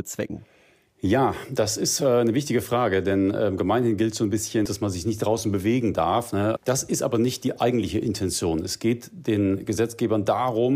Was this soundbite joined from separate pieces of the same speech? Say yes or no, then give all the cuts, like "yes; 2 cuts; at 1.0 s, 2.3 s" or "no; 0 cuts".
yes; 2 cuts; at 4.7 s, 6.6 s